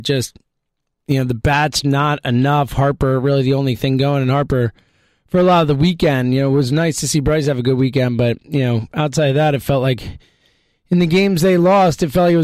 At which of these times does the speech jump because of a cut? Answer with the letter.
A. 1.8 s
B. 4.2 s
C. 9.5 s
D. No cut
A